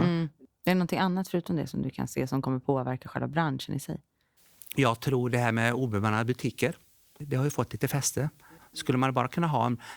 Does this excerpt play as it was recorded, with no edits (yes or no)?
yes